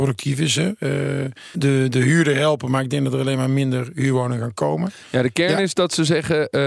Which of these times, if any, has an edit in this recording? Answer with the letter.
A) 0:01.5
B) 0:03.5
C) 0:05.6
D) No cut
A